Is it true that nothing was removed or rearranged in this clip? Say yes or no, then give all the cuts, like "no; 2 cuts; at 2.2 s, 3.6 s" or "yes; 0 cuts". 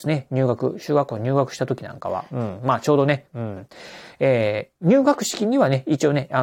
no; 1 cut; at 3.3 s